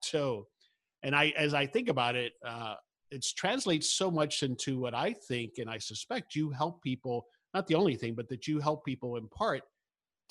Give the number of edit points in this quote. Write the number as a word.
zero